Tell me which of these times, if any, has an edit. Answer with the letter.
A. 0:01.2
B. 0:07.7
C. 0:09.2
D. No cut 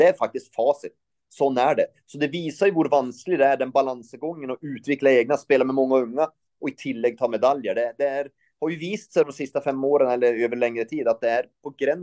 C